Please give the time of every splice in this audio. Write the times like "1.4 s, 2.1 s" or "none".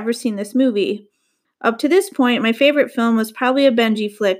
1.4 s

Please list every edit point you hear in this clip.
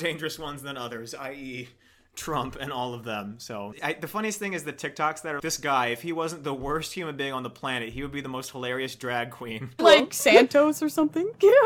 3.8 s, 5.4 s, 9.8 s

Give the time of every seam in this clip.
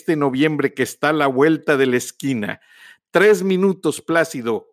none

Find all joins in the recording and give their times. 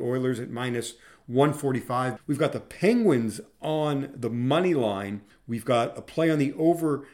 2.2 s, 5.3 s

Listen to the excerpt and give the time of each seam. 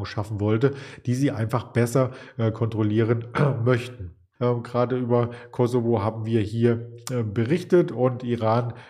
4.4 s

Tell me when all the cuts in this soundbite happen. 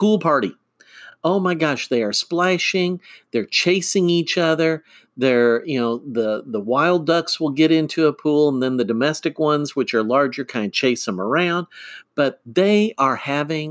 none

